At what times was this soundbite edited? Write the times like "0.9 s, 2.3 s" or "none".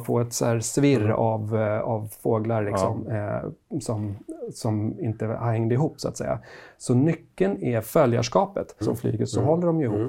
8.8 s